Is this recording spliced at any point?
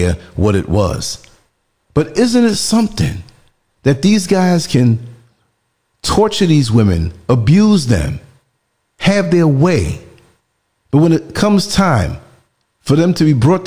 no; 0 cuts

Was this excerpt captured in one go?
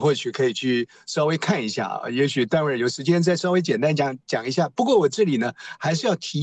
yes; 0 cuts

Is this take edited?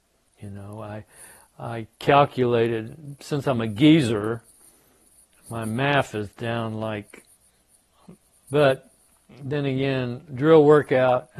yes; 2 cuts; at 8.4 s, 10.3 s

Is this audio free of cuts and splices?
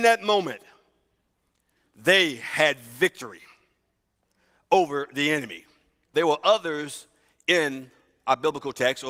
no; 1 cut; at 6.1 s

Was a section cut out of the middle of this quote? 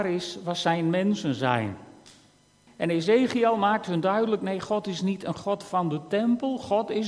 yes; 1 cut; at 2.7 s

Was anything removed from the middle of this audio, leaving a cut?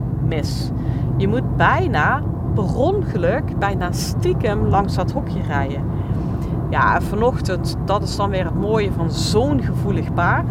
no; 0 cuts

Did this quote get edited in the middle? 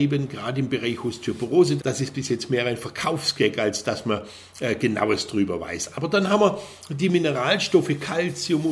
yes; 1 cut; at 1.8 s

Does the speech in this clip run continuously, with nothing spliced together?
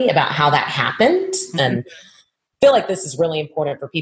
no; 1 cut; at 1.5 s

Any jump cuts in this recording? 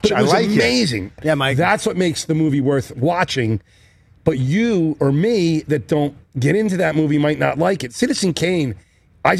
yes; 1 cut; at 1.2 s

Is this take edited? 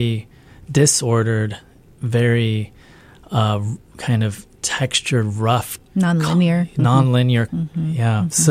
yes; 2 cuts; at 5.8 s, 7.5 s

